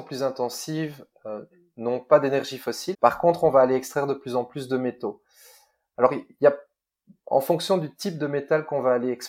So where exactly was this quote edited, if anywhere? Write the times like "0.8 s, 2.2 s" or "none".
2.9 s